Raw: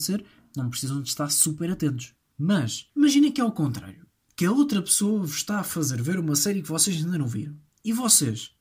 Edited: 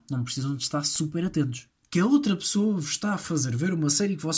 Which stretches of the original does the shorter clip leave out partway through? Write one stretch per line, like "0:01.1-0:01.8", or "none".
0:02.2-0:04.2

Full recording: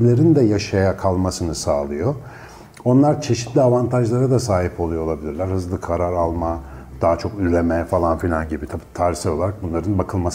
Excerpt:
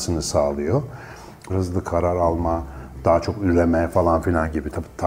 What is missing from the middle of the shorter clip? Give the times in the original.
0:02.8-0:05.5

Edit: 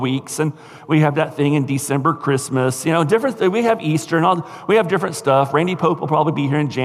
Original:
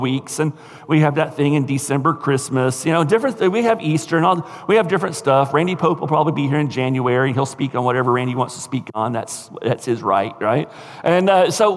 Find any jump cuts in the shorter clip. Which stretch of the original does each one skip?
none

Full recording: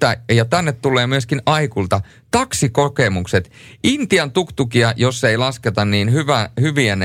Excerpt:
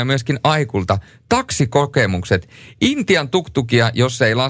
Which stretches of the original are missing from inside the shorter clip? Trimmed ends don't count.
none

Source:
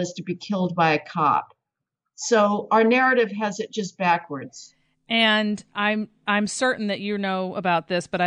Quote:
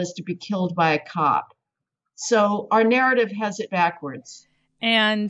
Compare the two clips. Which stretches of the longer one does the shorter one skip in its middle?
0:03.7-0:04.0

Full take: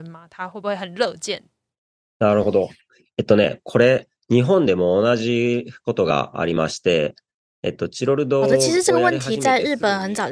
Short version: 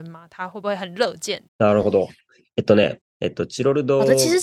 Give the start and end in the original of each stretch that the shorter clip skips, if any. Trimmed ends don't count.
0:01.5-0:02.1
0:03.6-0:07.4

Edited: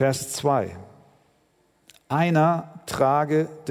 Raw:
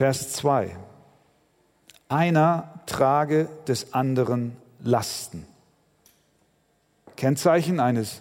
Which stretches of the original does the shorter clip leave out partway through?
none

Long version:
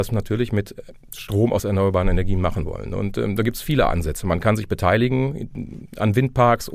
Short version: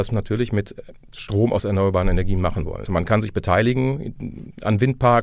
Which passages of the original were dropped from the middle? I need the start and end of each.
0:02.9-0:04.2

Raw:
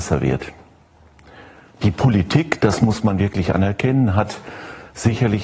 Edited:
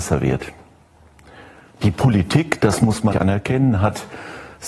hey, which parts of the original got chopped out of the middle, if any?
0:03.1-0:03.5

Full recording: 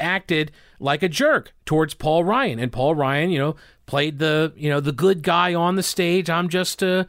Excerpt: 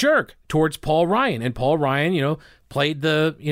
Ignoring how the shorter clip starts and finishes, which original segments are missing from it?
none

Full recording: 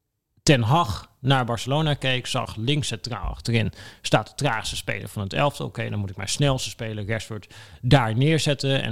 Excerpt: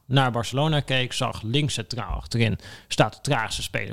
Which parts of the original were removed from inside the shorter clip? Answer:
none

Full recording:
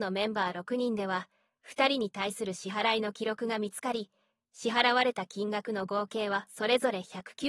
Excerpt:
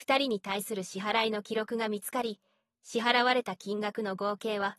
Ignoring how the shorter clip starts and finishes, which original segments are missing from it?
none

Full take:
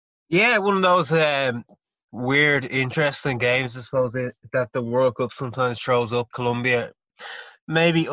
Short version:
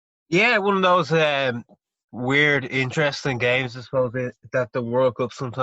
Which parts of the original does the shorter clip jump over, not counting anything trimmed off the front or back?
none

